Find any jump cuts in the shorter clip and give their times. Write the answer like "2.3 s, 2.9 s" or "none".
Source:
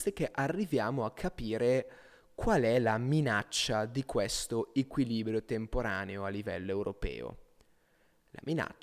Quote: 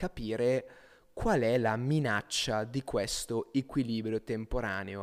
none